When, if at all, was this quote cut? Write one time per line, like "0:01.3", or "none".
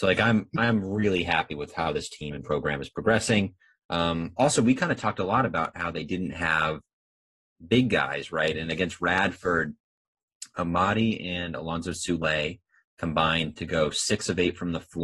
none